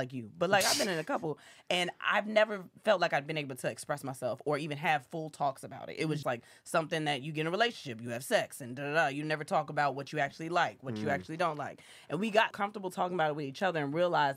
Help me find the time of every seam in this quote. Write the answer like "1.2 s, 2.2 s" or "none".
6.2 s, 12.5 s